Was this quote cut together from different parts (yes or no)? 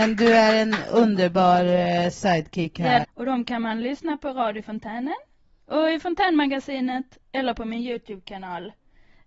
yes